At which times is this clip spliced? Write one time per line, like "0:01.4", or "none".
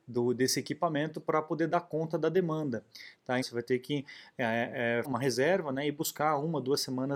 0:03.4
0:05.0